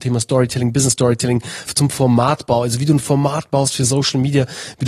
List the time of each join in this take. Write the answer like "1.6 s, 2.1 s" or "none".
1.7 s